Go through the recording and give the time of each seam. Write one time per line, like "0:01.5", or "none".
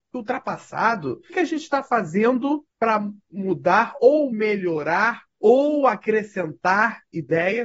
0:01.3
0:02.7
0:05.3